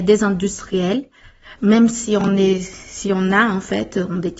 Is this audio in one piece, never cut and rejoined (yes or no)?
no